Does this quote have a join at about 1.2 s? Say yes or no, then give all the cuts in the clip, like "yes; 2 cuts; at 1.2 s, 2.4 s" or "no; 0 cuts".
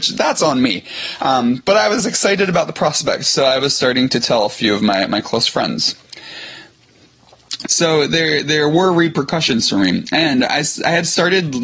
no; 1 cut; at 7.6 s